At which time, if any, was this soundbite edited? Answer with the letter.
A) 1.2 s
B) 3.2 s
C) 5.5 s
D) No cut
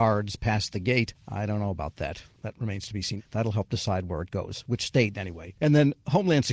B